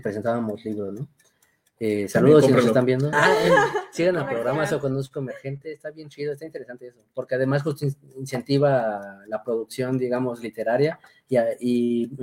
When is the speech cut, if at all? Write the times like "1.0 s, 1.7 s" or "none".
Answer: 3.1 s